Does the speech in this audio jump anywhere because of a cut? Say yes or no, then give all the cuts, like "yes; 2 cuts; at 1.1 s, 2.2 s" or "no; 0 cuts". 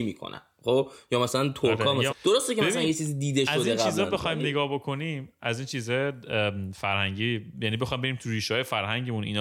yes; 1 cut; at 2.1 s